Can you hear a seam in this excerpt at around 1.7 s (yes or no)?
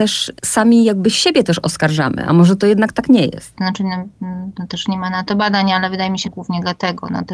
no